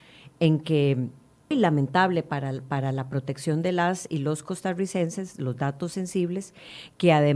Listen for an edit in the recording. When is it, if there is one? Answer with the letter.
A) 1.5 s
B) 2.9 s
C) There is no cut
A